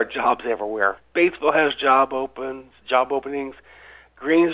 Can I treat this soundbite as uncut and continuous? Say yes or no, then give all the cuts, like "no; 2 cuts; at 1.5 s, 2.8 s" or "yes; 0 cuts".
no; 1 cut; at 1.0 s